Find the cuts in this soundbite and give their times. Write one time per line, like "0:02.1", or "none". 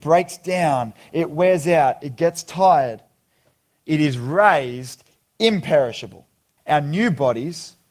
0:06.6